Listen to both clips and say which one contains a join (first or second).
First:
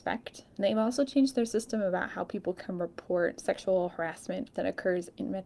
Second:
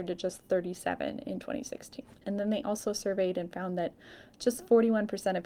second